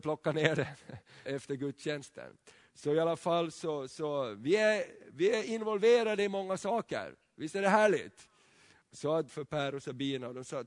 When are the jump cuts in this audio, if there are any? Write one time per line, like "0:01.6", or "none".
0:01.3
0:09.3